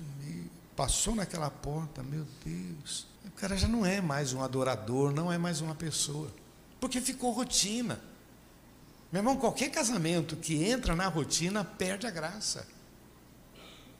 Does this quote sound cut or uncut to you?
cut